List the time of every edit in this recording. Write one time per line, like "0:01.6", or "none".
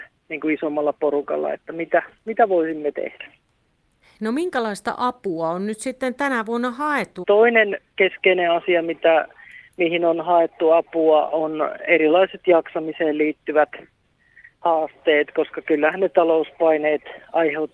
0:07.2

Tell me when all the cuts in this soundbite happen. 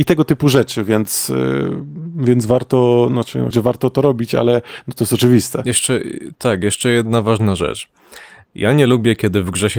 0:03.5

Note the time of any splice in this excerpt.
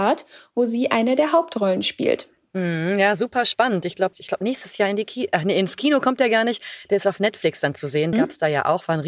0:04.1
0:08.1

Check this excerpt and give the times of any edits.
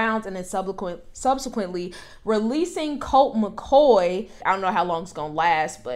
0:04.4

